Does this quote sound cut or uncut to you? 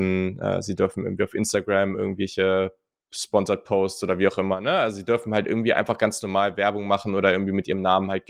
uncut